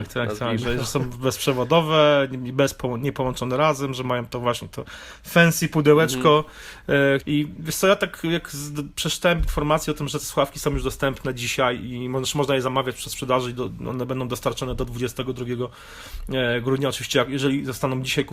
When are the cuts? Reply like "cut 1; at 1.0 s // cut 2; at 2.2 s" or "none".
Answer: cut 1; at 7.2 s